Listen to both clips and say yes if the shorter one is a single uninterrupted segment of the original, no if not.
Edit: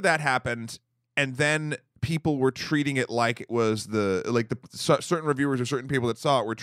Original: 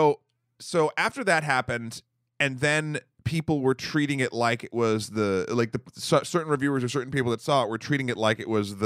yes